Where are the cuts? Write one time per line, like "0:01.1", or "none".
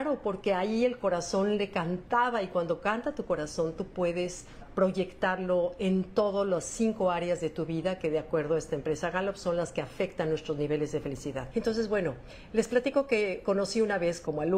0:11.5